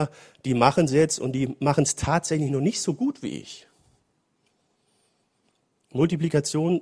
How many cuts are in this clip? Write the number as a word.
zero